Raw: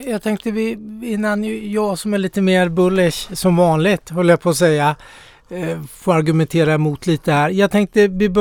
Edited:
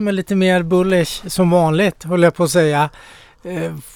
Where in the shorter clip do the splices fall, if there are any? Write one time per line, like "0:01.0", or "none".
none